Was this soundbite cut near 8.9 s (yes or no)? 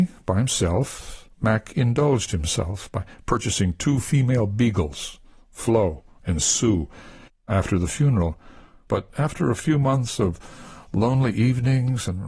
yes